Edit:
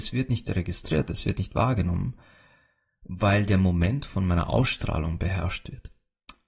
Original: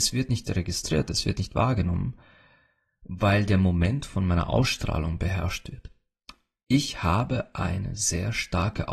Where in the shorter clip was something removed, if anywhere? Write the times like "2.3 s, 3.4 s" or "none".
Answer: none